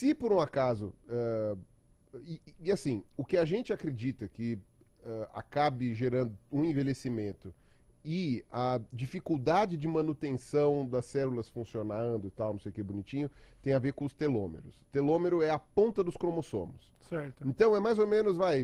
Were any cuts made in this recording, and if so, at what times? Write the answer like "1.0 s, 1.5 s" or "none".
none